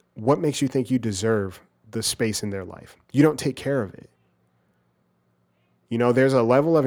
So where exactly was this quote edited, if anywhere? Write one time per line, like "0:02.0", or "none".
none